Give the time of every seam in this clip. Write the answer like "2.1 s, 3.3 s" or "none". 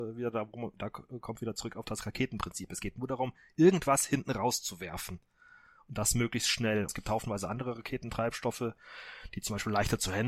6.9 s